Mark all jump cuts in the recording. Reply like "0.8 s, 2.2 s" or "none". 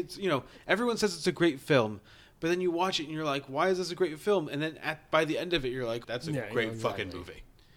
6.0 s